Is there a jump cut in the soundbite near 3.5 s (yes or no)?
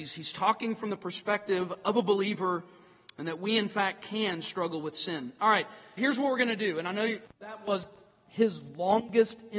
no